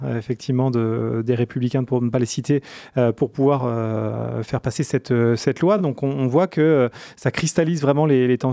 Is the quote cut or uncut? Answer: uncut